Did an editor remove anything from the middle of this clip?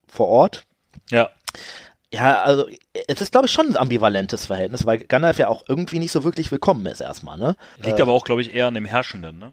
yes; 1 cut; at 7.8 s

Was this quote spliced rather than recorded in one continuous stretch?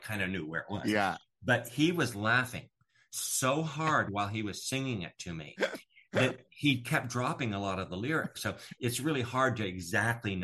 yes; 1 cut; at 8.3 s

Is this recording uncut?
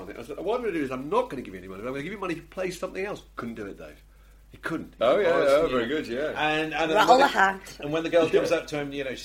no; 1 cut; at 5.0 s

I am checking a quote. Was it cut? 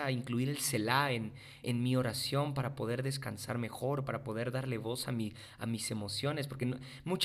yes; 1 cut; at 1.6 s

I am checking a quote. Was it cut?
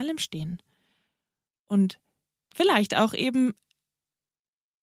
no; 0 cuts

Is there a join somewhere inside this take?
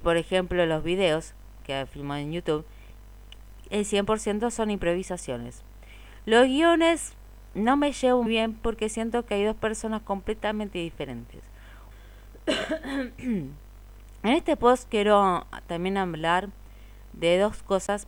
yes; 2 cuts; at 8.3 s, 11.9 s

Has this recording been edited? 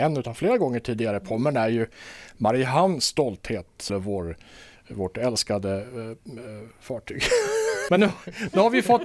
yes; 2 cuts; at 3.9 s, 7.9 s

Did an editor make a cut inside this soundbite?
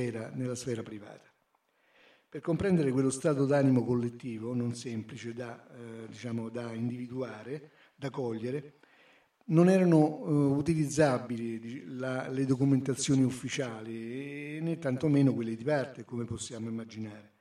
no; 0 cuts

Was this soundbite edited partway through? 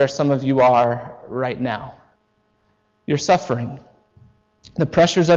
no; 0 cuts

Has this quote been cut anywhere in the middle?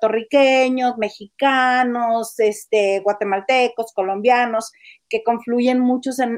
no; 0 cuts

